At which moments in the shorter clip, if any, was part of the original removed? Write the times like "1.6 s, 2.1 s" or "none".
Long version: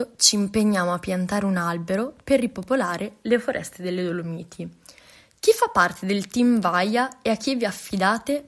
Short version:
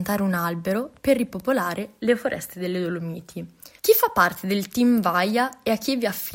3.8 s